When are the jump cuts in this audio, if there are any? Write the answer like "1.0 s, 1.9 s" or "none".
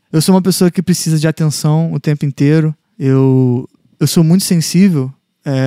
none